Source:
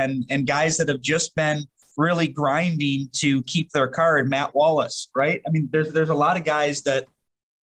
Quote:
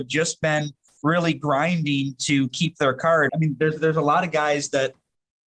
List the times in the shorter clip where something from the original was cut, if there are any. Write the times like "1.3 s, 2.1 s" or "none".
3.3 s